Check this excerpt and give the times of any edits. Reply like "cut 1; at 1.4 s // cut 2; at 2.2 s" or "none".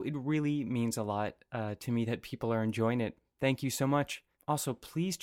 none